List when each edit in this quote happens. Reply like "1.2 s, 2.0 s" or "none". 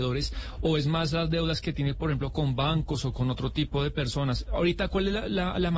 none